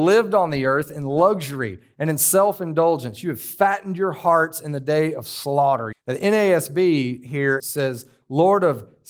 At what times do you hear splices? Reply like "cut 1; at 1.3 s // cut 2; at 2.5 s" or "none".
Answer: cut 1; at 5.9 s // cut 2; at 7.6 s